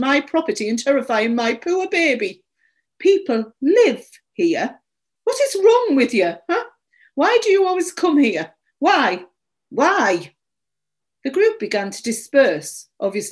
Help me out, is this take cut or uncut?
uncut